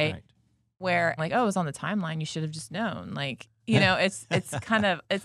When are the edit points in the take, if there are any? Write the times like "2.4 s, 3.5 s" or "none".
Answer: 1.2 s